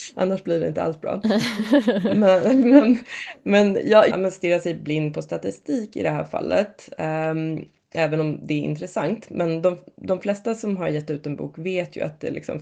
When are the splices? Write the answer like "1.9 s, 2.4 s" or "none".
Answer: 4.1 s